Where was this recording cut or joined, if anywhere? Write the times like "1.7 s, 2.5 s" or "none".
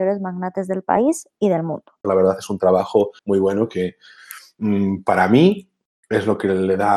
2.0 s, 3.2 s